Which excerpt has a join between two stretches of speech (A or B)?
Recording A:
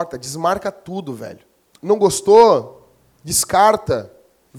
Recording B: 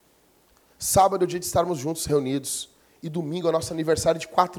A